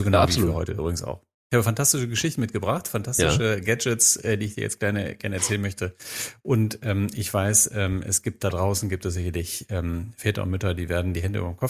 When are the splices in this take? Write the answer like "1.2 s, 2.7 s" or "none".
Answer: none